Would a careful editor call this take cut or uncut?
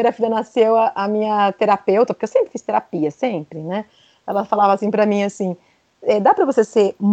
uncut